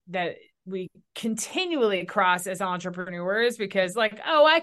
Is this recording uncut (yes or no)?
yes